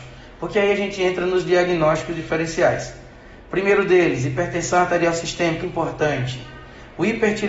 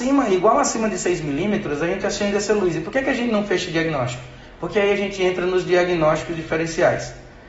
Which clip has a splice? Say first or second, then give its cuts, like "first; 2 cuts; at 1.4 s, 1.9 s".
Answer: first; 1 cut; at 5.6 s